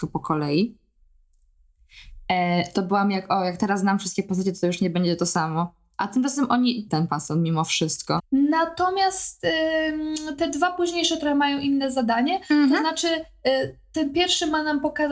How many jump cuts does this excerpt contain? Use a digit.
2